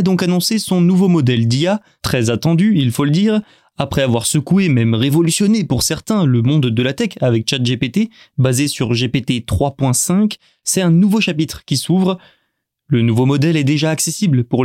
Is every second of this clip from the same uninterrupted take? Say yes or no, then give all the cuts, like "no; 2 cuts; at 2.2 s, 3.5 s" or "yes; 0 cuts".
yes; 0 cuts